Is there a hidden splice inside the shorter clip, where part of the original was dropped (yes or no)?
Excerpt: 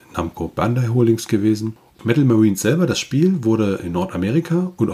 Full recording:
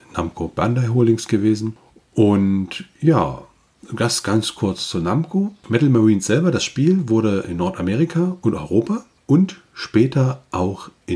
yes